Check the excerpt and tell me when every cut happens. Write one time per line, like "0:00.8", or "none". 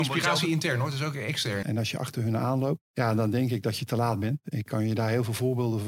0:01.6
0:02.9